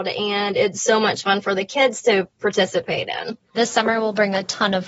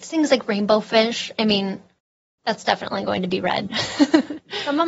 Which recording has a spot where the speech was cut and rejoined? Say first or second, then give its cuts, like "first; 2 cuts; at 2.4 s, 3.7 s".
first; 1 cut; at 3.5 s